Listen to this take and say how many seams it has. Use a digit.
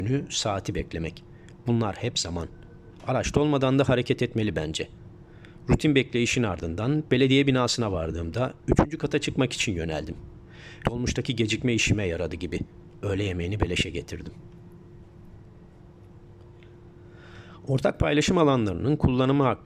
2